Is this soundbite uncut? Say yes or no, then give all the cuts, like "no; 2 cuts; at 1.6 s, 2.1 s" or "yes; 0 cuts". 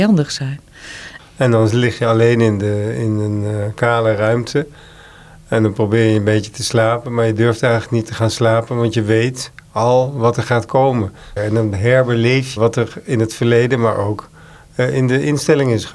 no; 3 cuts; at 1.2 s, 11.4 s, 12.6 s